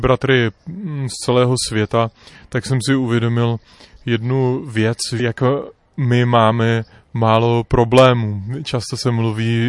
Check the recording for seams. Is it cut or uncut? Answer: uncut